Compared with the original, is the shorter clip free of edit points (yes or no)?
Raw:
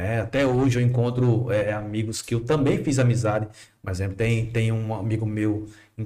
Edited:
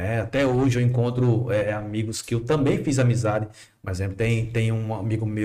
yes